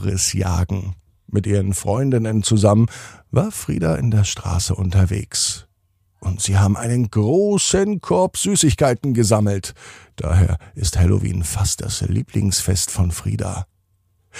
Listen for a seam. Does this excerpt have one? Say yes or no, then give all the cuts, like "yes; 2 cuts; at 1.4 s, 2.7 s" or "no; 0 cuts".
no; 0 cuts